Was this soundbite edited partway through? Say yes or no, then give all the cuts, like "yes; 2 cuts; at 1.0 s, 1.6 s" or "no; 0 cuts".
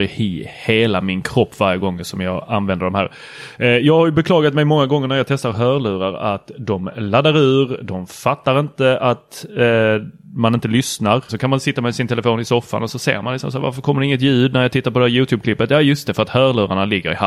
yes; 1 cut; at 11.3 s